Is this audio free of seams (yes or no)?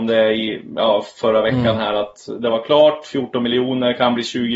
yes